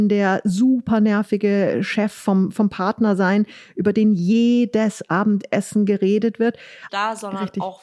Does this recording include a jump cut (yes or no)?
yes